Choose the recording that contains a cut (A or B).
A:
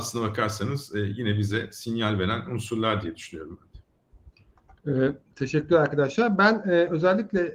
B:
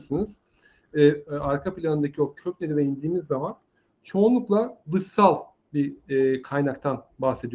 B